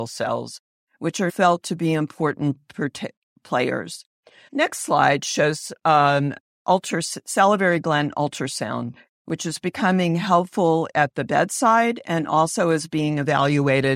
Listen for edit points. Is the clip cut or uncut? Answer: cut